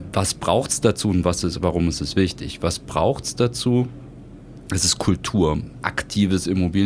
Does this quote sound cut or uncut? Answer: cut